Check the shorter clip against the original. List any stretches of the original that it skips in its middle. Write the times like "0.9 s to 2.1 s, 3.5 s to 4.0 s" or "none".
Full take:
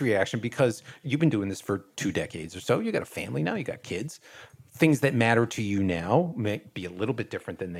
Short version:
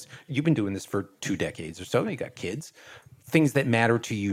2.8 s to 3.5 s